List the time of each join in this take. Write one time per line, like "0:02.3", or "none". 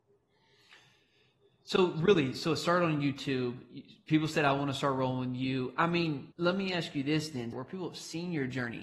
0:06.3
0:07.5